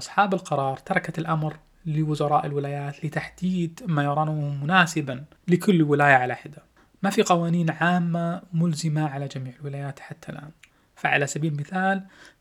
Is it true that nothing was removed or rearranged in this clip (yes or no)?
yes